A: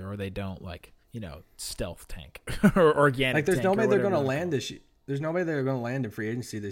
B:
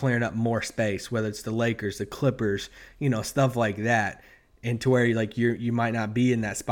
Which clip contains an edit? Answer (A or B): A